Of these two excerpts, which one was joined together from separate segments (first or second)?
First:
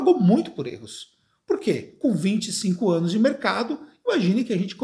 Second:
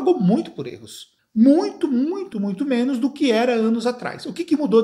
second